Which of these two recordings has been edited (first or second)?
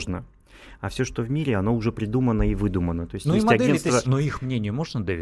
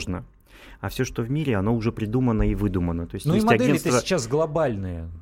first